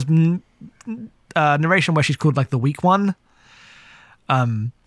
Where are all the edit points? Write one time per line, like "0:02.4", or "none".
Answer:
none